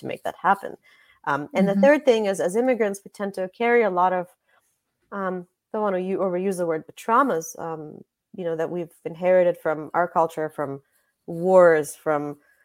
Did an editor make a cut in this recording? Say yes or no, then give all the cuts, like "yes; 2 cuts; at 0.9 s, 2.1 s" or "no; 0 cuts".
no; 0 cuts